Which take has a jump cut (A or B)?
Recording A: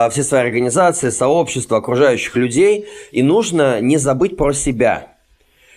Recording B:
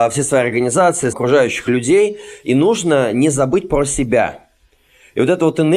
B